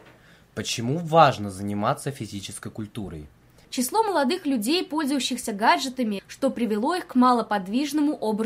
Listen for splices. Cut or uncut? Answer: cut